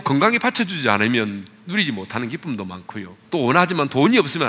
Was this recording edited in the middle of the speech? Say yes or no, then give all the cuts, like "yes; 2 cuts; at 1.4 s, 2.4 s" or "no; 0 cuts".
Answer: yes; 1 cut; at 3.3 s